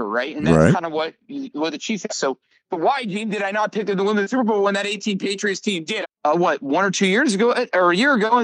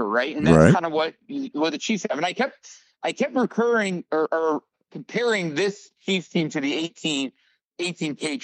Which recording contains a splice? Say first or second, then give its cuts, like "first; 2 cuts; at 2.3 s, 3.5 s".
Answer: first; 2 cuts; at 2.1 s, 6.0 s